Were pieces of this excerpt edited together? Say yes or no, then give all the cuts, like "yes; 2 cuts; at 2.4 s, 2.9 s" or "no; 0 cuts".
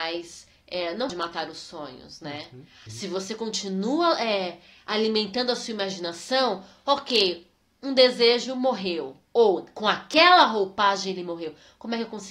yes; 1 cut; at 2.9 s